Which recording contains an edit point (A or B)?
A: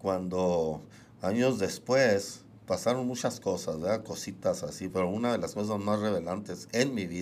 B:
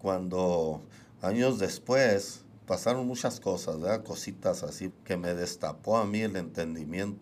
B